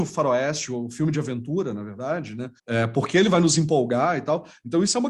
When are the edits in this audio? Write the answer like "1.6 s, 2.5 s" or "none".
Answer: 2.6 s